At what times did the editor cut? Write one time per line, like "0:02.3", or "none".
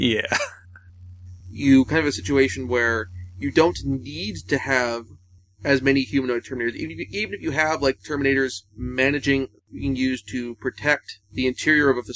none